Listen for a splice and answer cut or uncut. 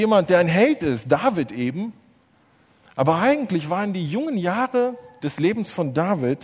uncut